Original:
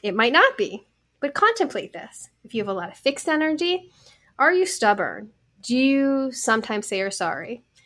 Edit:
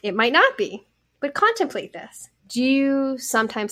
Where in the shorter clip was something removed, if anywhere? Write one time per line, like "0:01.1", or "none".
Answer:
0:02.4